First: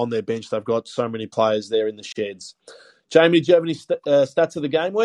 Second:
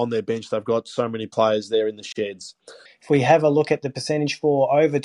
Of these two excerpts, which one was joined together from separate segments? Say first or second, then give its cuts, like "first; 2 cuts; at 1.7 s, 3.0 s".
second; 1 cut; at 2.9 s